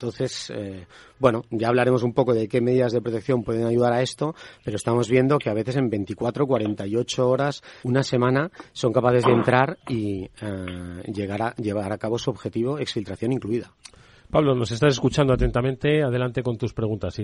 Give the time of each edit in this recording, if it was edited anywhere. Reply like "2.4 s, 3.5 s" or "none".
7.8 s